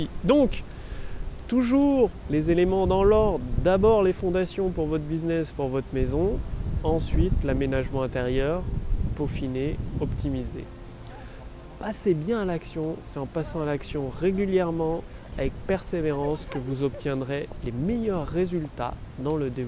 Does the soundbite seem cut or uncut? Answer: uncut